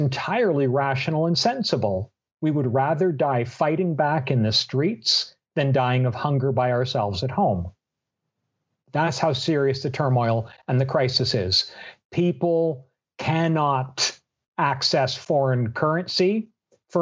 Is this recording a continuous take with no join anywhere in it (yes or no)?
yes